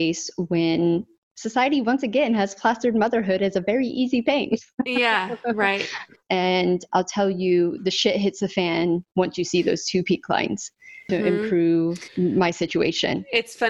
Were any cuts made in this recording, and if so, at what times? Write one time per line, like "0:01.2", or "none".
0:06.2
0:11.1